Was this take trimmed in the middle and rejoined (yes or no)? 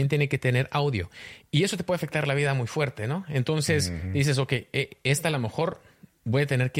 yes